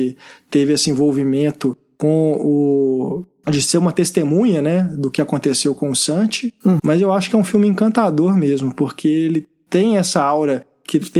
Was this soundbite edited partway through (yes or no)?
yes